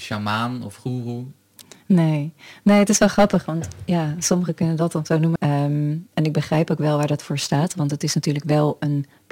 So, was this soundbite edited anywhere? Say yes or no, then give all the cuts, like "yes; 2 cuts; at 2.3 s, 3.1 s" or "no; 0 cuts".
yes; 1 cut; at 5.4 s